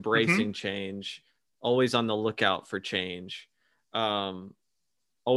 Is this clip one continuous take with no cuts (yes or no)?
yes